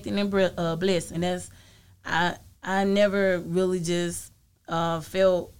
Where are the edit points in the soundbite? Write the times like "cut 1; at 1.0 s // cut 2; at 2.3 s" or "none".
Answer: cut 1; at 1.1 s